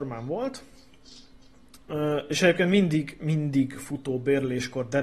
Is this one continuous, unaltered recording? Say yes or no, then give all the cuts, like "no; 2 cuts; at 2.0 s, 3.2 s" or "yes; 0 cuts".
yes; 0 cuts